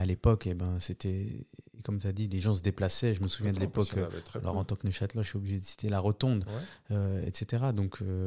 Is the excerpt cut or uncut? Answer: uncut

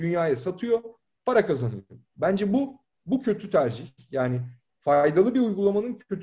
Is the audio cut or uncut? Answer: uncut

